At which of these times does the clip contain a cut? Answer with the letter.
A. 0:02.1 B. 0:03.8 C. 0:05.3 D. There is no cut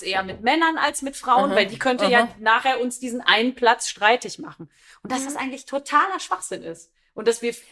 D